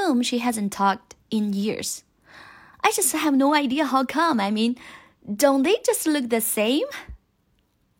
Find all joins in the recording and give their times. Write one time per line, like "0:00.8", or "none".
0:02.7

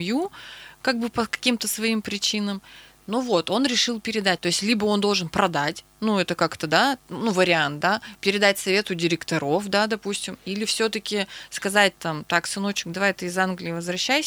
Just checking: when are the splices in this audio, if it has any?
0:04.4

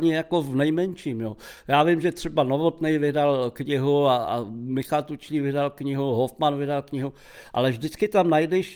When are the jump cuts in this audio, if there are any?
none

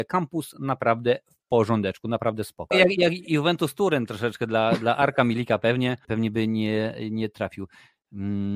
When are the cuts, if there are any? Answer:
0:02.7
0:06.0

